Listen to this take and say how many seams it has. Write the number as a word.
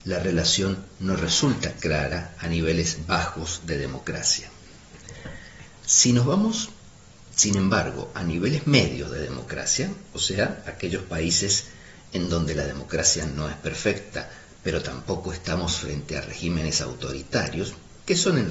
zero